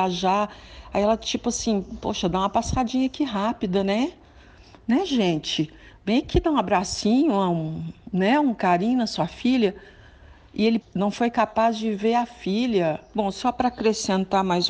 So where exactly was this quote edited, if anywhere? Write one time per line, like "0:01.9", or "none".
0:10.8
0:13.1